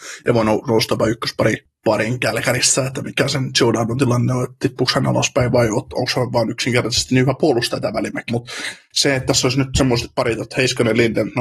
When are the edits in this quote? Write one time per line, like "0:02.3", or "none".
0:08.3